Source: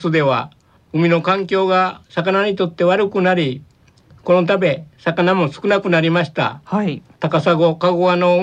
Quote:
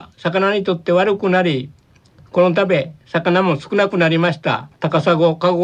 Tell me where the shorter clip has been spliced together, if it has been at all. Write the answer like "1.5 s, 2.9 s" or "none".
4.7 s